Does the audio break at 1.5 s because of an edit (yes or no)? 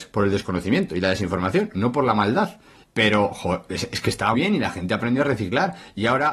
no